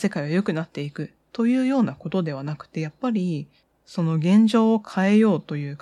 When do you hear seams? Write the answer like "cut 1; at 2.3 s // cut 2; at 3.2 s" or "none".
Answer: none